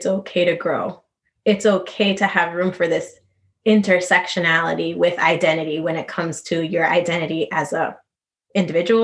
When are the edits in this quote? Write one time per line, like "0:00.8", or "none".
none